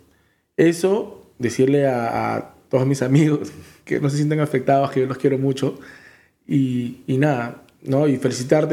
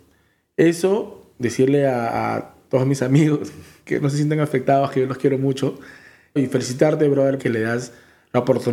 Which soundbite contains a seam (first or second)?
second